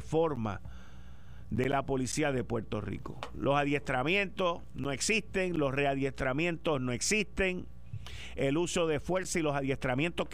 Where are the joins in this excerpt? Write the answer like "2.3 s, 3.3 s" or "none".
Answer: none